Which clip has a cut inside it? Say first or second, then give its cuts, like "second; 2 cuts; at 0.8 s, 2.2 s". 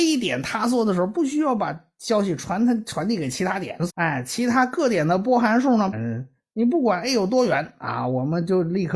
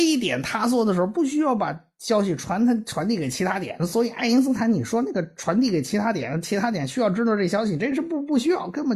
first; 2 cuts; at 3.9 s, 5.9 s